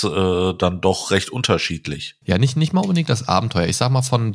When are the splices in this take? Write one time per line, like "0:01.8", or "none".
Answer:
0:02.2